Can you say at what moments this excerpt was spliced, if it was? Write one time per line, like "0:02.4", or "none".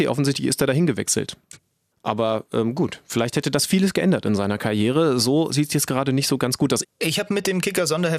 0:01.9
0:06.8

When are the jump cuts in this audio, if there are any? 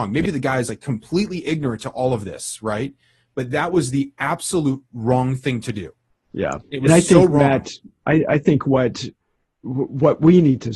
none

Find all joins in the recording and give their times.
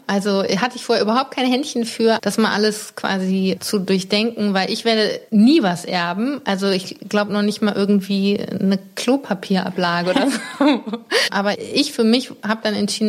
0:02.2
0:11.3

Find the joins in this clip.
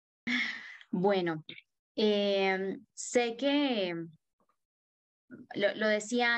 none

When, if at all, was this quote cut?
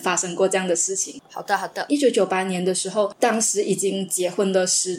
none

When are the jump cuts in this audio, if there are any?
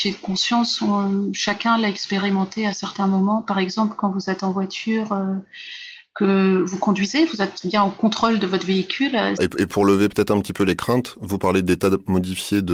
0:09.4

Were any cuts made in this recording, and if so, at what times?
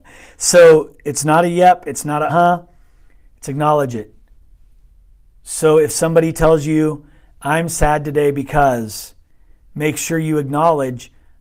0:02.3

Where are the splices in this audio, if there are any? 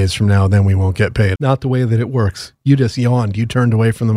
0:01.4

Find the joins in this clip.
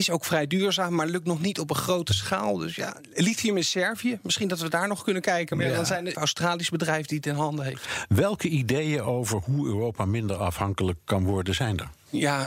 0:06.1

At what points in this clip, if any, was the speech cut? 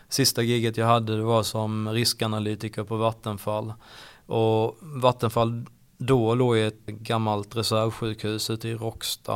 0:06.9

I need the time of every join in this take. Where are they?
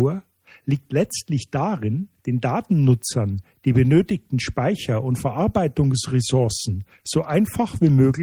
0:02.2

